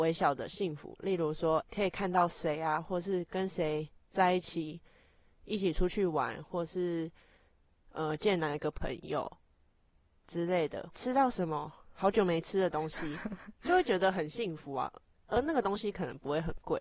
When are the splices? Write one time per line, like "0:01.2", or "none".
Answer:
0:01.6
0:10.9